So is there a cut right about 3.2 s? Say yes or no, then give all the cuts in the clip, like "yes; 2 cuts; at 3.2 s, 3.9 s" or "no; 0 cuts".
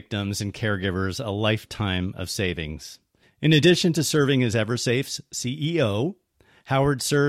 yes; 1 cut; at 3.2 s